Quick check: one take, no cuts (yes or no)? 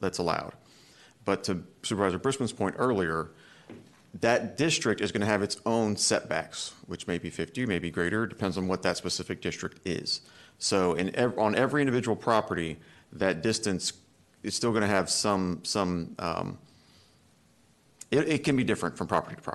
yes